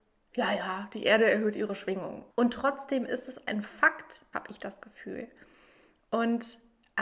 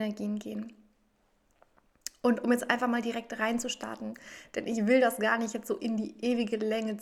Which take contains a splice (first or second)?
first